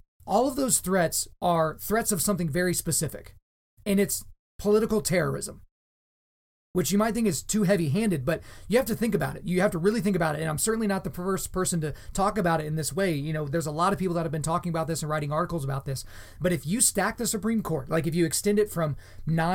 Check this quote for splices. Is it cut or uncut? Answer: uncut